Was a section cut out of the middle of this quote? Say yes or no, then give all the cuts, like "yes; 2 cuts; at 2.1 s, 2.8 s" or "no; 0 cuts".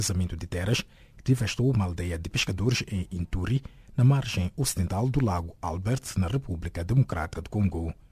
no; 0 cuts